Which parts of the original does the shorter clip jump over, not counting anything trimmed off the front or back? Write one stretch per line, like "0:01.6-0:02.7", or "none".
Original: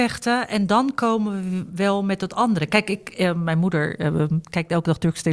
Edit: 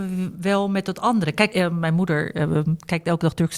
0:02.9-0:03.2